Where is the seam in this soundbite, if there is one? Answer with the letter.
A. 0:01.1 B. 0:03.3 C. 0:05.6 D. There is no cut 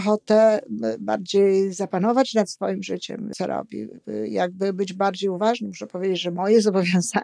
B